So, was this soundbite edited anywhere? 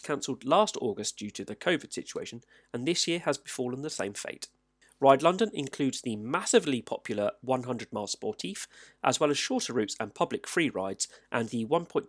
no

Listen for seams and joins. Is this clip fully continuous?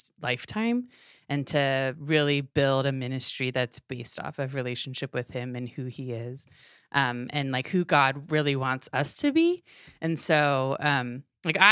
yes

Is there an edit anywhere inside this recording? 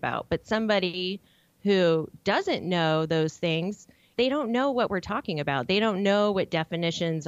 yes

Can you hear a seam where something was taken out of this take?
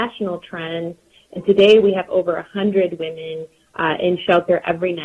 yes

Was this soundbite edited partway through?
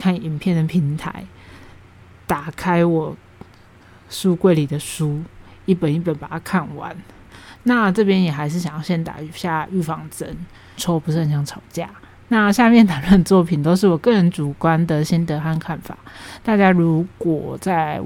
yes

